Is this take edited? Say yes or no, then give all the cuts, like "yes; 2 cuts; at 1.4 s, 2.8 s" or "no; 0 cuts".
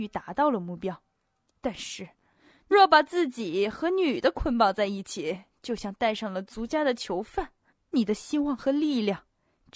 yes; 2 cuts; at 2.7 s, 7.7 s